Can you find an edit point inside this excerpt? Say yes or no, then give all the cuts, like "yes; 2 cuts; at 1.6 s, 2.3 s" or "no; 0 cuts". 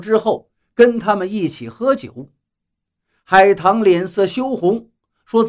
no; 0 cuts